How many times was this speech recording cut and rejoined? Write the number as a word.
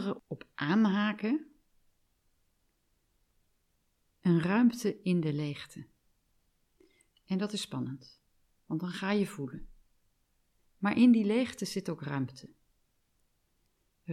two